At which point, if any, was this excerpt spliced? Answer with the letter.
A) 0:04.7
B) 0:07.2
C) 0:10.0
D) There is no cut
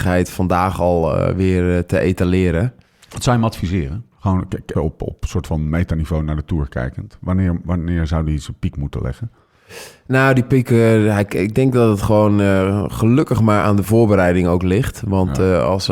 A